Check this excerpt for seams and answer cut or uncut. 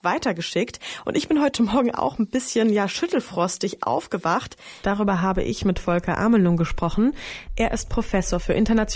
cut